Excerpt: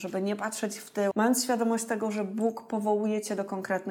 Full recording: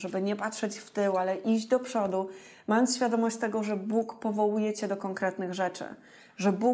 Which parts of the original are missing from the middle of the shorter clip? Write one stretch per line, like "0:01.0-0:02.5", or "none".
0:01.1-0:02.6